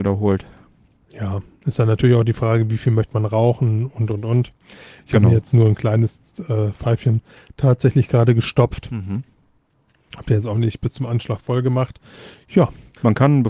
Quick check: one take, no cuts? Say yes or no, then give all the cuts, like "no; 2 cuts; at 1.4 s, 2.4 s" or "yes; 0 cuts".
yes; 0 cuts